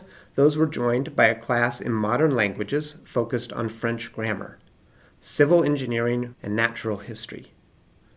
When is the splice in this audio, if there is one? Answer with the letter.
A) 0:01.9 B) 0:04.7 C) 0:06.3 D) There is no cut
C